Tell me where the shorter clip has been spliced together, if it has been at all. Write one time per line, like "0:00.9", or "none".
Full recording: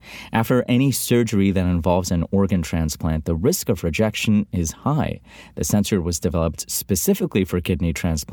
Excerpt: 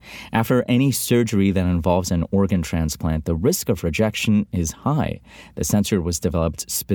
none